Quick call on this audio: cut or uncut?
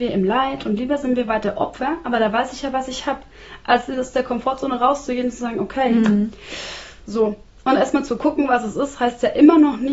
cut